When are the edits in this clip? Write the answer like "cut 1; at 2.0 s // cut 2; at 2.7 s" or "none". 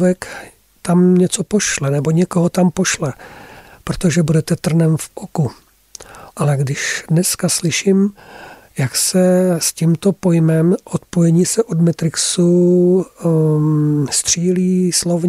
cut 1; at 6.3 s